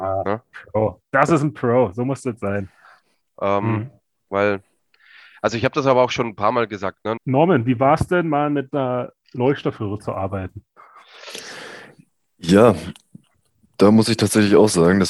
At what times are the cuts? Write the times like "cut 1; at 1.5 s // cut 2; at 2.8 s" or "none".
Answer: cut 1; at 3.2 s // cut 2; at 7.2 s